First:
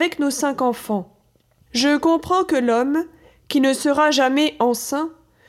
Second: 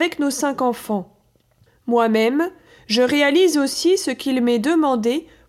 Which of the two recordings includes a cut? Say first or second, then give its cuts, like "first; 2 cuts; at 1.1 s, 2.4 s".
first; 1 cut; at 1.6 s